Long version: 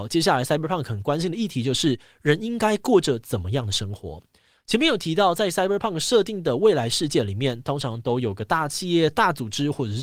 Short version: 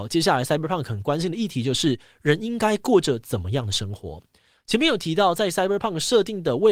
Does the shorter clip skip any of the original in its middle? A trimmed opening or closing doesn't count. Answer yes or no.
no